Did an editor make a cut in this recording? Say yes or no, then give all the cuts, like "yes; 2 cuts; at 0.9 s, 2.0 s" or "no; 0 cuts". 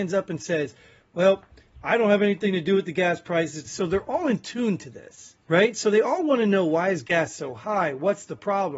yes; 2 cuts; at 3.6 s, 5.4 s